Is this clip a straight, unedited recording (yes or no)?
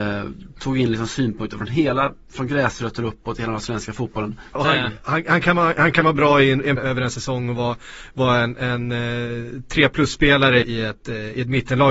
no